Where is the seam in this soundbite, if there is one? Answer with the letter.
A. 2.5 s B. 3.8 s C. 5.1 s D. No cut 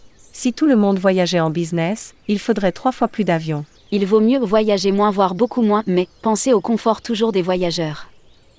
B